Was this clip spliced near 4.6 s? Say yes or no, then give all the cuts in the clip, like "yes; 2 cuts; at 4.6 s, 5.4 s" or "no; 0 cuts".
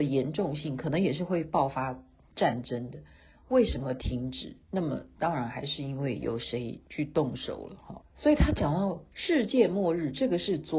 yes; 2 cuts; at 4.6 s, 8.0 s